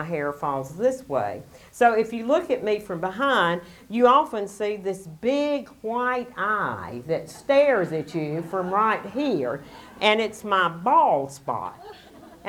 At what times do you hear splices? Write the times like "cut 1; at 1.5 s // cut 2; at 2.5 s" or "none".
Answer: none